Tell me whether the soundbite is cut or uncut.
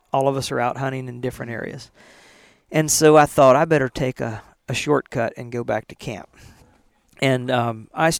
uncut